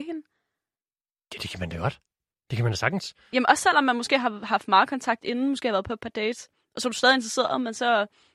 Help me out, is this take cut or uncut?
uncut